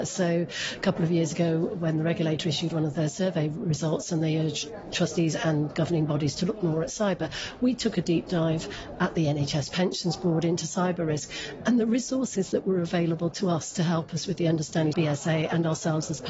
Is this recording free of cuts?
no; 1 cut; at 14.9 s

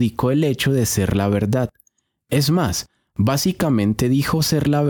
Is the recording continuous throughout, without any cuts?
yes; 0 cuts

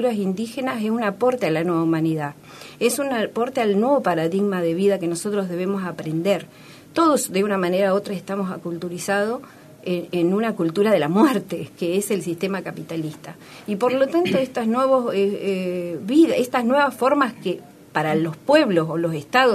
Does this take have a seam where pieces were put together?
no; 0 cuts

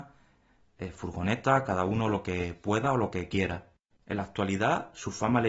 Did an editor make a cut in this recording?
yes; 1 cut; at 4.0 s

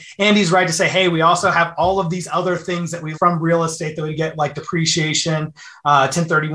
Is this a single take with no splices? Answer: no; 1 cut; at 3.1 s

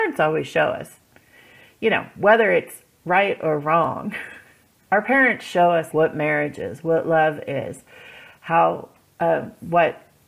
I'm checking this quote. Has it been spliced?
yes; 2 cuts; at 4.9 s, 5.9 s

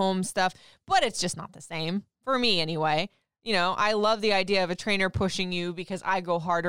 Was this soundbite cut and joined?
no; 0 cuts

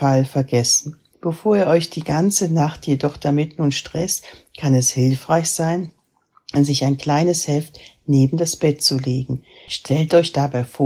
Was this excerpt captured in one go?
no; 2 cuts; at 1.1 s, 9.7 s

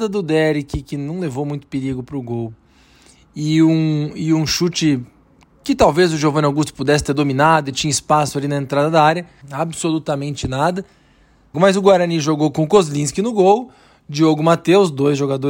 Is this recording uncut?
no; 2 cuts; at 9.4 s, 11.5 s

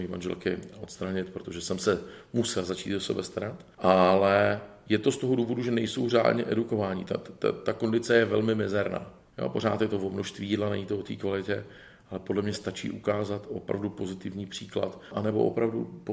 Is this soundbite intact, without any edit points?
yes; 0 cuts

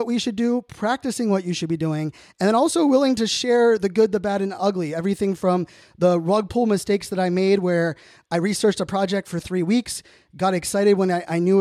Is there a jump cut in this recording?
no; 0 cuts

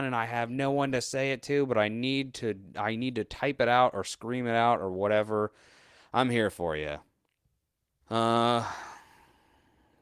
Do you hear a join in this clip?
yes; 1 cut; at 8.0 s

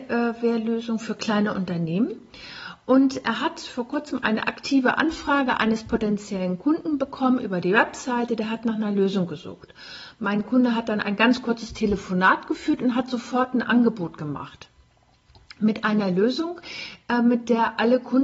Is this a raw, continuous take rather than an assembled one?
yes; 0 cuts

